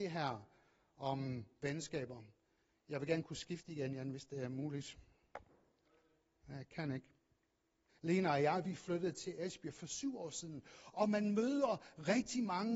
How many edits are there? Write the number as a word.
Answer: one